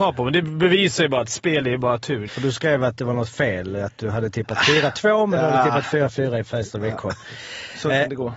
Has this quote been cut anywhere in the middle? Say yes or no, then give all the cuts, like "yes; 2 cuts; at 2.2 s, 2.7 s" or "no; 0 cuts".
yes; 1 cut; at 2.3 s